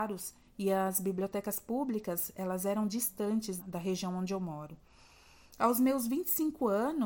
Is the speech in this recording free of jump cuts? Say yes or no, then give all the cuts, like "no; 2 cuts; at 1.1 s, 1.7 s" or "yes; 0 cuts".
no; 1 cut; at 3.6 s